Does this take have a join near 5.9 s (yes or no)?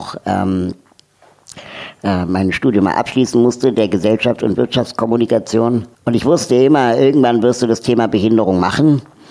yes